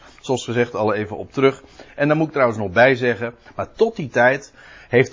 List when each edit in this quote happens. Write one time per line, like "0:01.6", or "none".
0:03.5